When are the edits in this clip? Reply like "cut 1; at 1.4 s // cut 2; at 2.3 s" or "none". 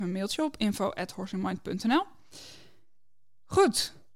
none